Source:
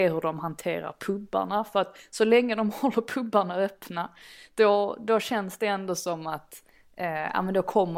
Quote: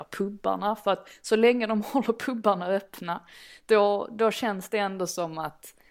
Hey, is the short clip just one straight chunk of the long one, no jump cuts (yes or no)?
yes